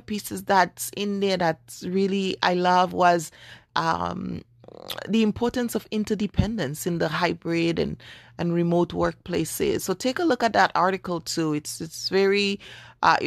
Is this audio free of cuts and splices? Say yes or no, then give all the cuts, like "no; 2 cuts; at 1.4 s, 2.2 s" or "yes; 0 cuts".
yes; 0 cuts